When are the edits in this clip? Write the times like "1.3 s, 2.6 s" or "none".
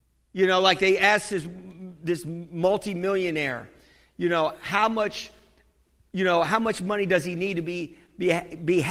none